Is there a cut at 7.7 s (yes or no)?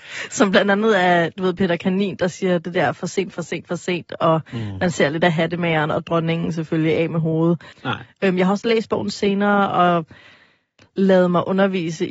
yes